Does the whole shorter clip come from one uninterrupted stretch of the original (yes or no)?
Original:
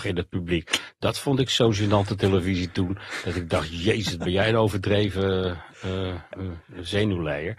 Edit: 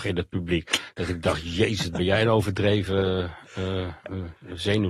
no